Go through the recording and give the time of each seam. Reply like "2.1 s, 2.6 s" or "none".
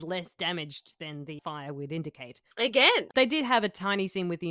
1.4 s, 2.5 s

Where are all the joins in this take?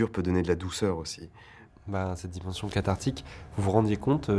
1.7 s

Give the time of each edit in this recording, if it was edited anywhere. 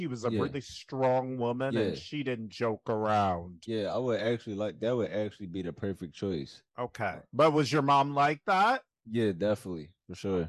6.7 s

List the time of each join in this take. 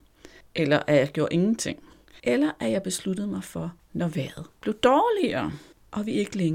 2.2 s, 3.8 s

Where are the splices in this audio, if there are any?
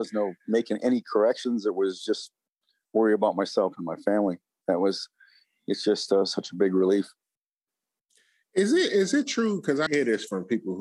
9.9 s

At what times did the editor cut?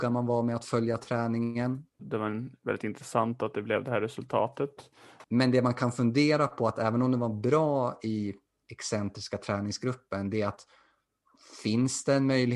2.0 s, 5.2 s

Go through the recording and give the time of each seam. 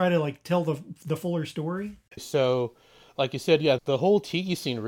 2.2 s, 3.8 s

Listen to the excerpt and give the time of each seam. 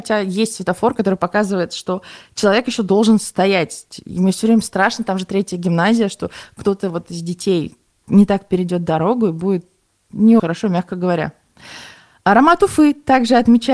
10.4 s

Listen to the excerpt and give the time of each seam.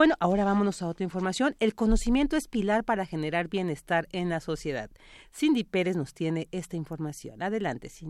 none

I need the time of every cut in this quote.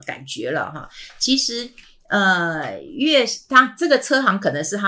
none

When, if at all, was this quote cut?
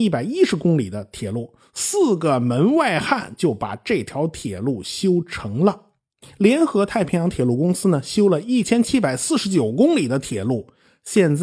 none

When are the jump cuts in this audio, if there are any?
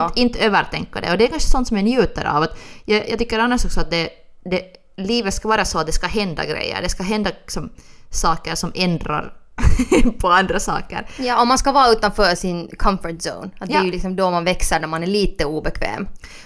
none

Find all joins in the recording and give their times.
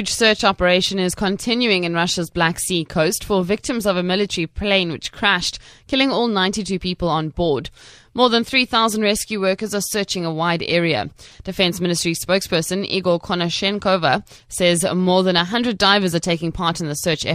none

